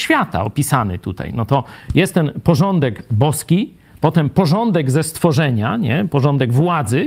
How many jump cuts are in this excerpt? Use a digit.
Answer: 0